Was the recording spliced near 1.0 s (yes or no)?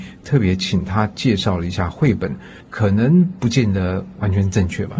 no